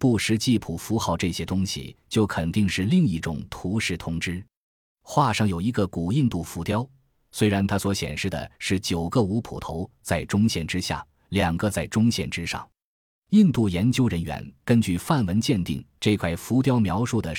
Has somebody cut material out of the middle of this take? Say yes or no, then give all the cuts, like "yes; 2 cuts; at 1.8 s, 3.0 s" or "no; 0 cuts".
no; 0 cuts